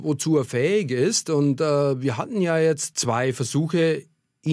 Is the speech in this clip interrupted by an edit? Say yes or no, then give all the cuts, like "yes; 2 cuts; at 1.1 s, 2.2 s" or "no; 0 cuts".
yes; 1 cut; at 2.9 s